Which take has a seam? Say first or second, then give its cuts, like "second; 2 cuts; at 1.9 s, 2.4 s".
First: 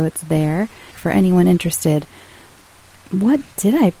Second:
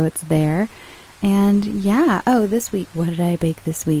first; 1 cut; at 0.9 s